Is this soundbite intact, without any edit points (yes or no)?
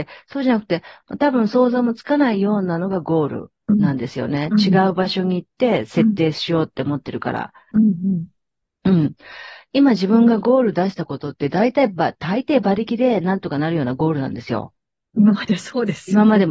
no